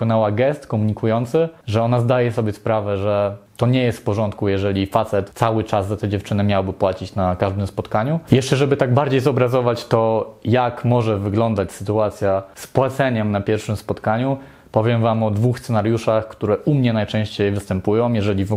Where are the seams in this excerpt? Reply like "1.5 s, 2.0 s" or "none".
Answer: 8.3 s